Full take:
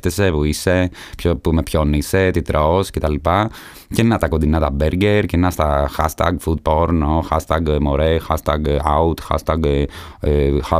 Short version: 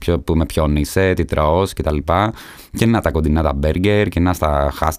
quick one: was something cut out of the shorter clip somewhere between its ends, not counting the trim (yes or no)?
no